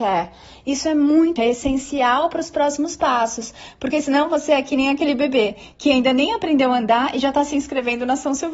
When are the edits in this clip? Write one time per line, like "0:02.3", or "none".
0:01.4